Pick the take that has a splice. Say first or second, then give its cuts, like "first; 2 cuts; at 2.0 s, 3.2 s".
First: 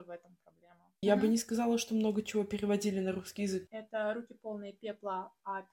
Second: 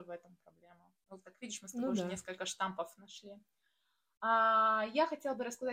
first; 2 cuts; at 1.0 s, 3.7 s